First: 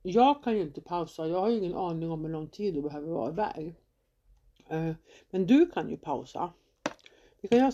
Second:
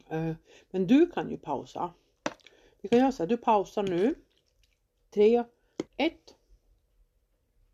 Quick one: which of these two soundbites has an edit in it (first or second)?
second